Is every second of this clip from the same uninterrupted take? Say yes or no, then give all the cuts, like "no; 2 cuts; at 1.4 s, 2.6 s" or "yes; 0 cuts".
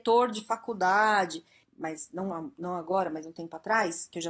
no; 1 cut; at 1.6 s